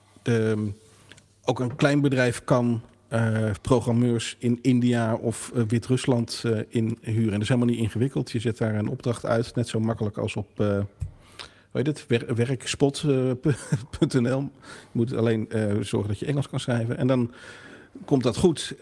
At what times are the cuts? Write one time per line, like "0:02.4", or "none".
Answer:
0:03.6